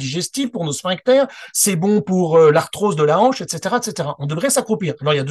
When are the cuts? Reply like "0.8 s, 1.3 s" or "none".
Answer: none